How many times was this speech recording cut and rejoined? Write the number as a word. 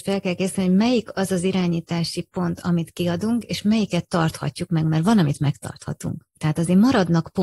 one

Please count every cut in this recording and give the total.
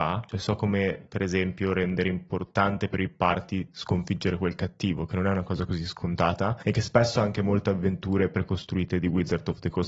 zero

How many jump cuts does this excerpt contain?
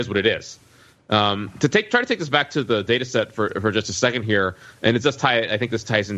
zero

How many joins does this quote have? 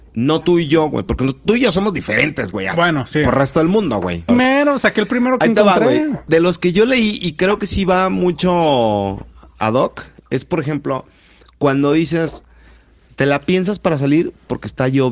one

